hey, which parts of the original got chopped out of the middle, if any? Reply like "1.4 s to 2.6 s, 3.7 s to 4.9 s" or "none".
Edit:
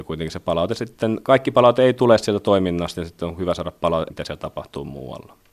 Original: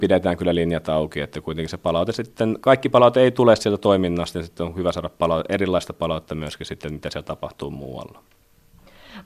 5.5 s to 7.0 s